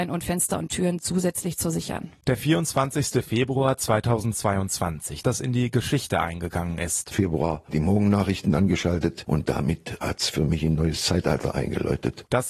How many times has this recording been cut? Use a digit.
2